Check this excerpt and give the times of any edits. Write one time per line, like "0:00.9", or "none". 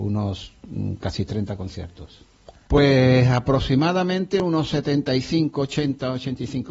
0:02.7